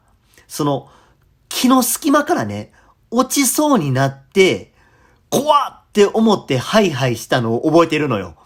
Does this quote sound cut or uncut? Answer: uncut